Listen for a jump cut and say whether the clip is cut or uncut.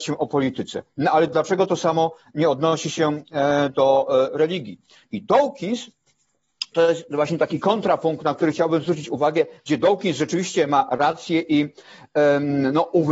uncut